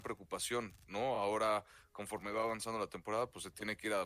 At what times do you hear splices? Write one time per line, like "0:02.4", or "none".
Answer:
none